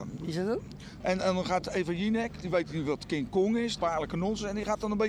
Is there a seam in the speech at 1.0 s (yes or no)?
yes